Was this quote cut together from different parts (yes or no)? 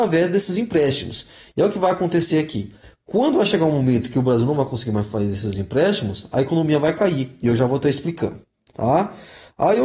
no